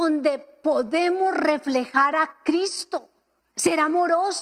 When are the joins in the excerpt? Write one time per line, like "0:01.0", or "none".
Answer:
0:03.4